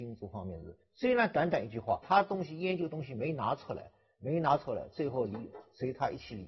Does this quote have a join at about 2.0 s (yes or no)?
yes